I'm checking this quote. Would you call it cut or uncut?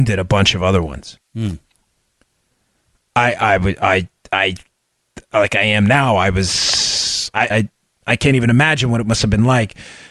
cut